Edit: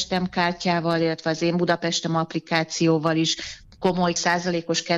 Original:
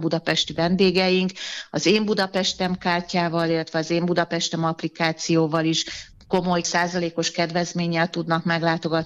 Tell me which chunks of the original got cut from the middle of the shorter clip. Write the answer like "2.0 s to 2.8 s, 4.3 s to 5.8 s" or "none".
none